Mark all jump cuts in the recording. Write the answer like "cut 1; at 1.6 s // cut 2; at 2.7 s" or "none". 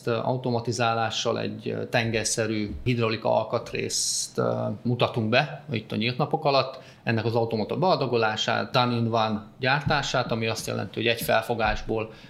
none